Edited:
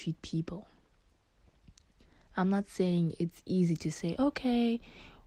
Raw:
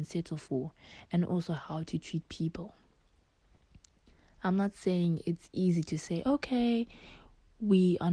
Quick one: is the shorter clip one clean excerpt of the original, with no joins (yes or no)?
yes